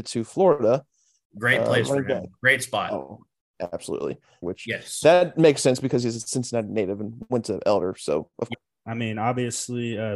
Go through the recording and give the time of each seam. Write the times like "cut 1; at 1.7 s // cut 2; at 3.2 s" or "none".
cut 1; at 4.4 s // cut 2; at 8.5 s